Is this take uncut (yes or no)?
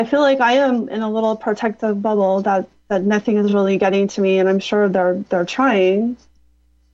yes